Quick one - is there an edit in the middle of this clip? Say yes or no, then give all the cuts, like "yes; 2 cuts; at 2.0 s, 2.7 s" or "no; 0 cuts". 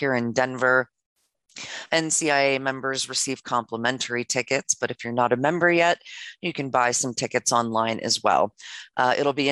no; 0 cuts